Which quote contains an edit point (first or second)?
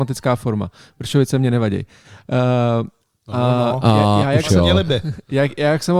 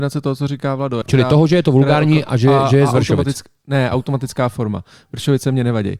second